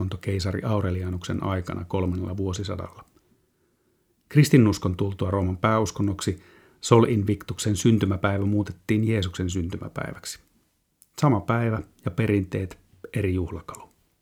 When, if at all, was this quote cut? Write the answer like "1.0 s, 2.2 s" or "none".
none